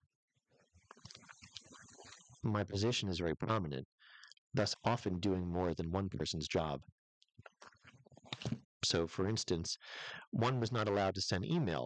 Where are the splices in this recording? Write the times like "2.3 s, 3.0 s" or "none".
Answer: 2.4 s, 4.7 s, 8.6 s